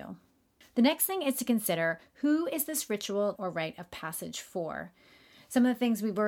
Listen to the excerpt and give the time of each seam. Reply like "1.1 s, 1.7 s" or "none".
3.4 s